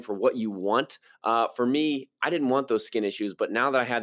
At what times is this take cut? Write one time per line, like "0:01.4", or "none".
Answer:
none